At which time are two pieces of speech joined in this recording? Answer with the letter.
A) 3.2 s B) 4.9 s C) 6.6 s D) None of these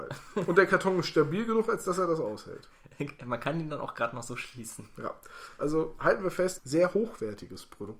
C